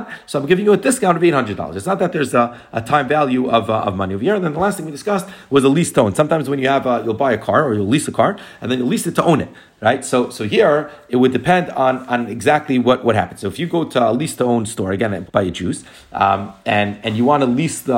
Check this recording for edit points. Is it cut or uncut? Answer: cut